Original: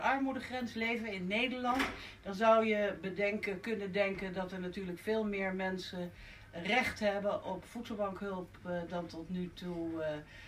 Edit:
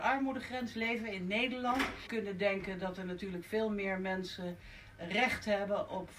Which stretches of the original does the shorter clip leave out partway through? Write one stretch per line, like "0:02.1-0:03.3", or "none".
0:02.1-0:03.6

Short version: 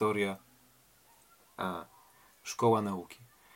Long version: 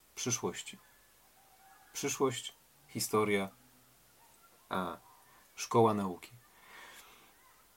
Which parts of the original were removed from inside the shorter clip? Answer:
none

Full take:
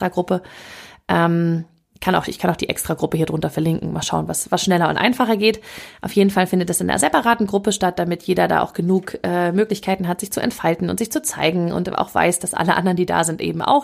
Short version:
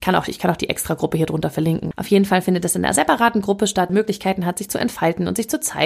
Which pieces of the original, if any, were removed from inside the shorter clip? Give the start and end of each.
0:03.9-0:06.0
0:07.9-0:09.5

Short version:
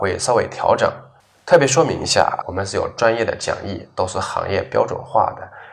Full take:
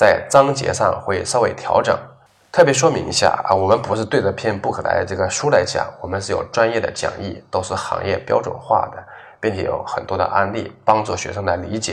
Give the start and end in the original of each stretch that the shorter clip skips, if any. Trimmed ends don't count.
0:03.5-0:06.0

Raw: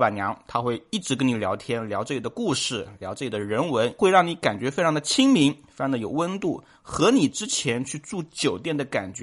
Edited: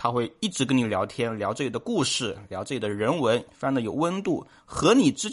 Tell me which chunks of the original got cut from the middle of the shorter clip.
0:04.0-0:05.6

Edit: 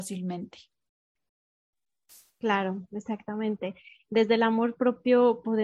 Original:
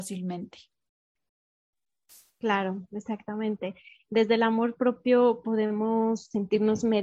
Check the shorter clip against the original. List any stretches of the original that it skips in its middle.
none

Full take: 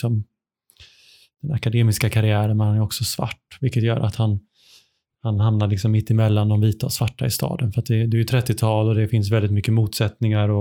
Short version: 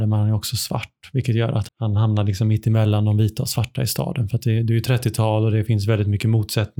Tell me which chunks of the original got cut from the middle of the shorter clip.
0:04.2-0:05.1

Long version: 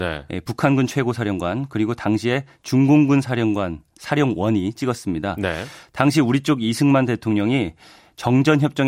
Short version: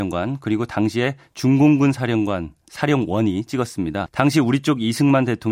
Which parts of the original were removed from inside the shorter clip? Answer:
0:05.3-0:05.9

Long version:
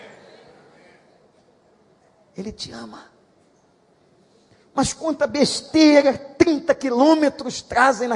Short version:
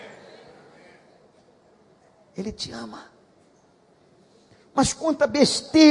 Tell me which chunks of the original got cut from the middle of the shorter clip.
none

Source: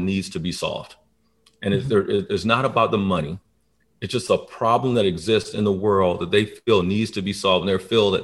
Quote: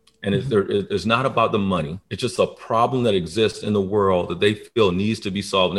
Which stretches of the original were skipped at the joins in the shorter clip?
0:03.4-0:04.0

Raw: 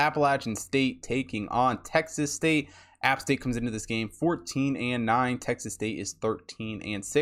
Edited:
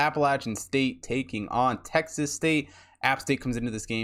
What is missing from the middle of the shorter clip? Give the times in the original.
none

